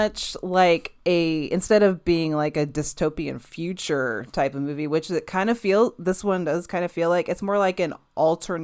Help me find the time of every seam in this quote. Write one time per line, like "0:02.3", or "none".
none